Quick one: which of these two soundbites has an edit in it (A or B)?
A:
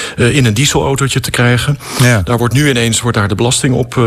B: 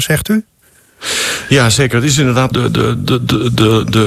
B